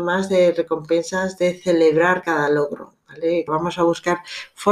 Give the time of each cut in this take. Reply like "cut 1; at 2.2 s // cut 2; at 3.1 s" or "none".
cut 1; at 3.5 s